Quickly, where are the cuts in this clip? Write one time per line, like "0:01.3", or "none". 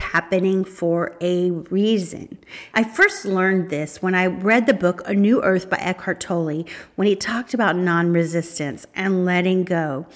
0:02.7